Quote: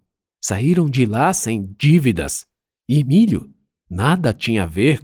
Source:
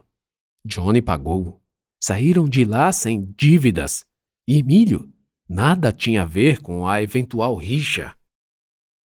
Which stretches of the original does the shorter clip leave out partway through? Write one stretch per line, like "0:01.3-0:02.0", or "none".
none